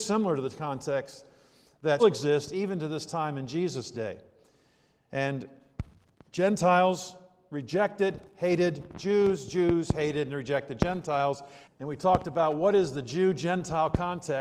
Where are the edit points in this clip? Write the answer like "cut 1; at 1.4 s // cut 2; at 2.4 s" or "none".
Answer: cut 1; at 2.0 s // cut 2; at 11.6 s